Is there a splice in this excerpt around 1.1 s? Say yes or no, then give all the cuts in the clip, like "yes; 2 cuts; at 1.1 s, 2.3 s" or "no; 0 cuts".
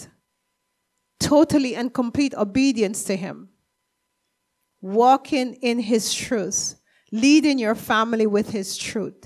no; 0 cuts